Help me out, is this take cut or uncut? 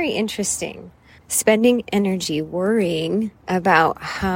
cut